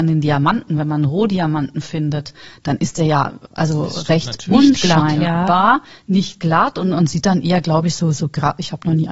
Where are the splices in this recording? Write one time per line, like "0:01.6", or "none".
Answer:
none